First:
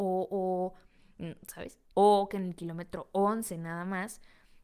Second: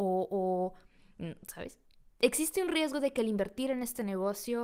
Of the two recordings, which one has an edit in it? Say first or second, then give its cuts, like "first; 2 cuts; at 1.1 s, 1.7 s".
first; 1 cut; at 1.9 s